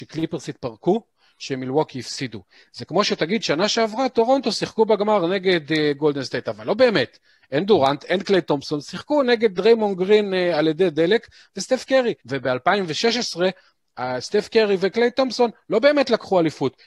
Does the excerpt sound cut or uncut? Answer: cut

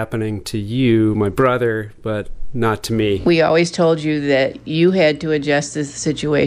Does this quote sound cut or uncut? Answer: uncut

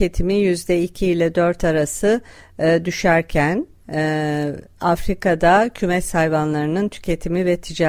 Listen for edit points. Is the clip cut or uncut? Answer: uncut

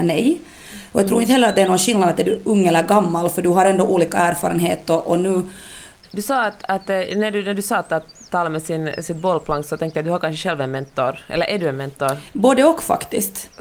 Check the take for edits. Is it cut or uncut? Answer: cut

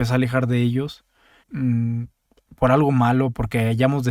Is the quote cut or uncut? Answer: cut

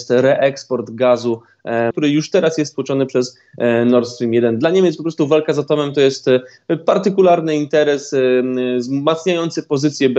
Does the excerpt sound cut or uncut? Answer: cut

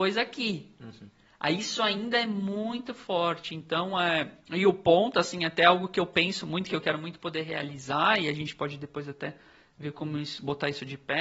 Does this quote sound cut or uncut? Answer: uncut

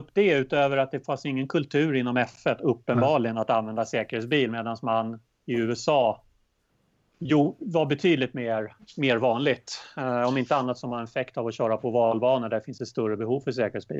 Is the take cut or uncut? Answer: uncut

